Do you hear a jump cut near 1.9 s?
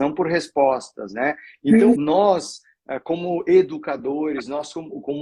yes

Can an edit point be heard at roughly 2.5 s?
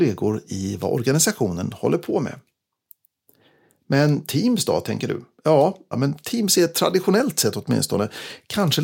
no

